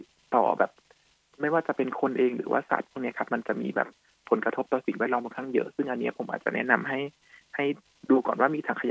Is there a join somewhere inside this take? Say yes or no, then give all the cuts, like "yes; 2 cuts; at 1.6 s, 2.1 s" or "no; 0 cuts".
no; 0 cuts